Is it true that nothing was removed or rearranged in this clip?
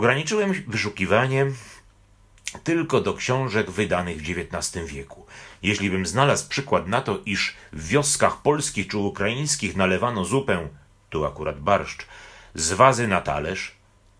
yes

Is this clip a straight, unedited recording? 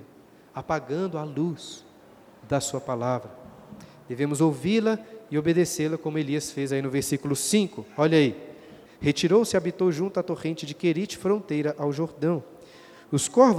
no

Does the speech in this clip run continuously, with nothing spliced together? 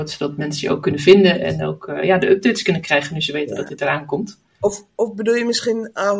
yes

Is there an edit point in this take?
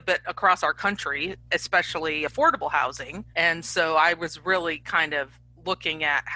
yes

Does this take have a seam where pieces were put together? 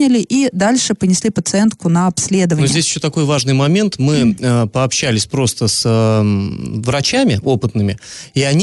no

